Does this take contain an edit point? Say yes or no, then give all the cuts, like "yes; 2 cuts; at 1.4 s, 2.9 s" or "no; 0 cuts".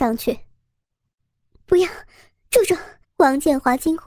yes; 1 cut; at 3.0 s